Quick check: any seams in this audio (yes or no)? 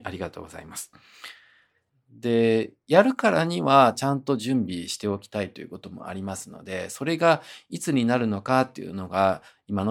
yes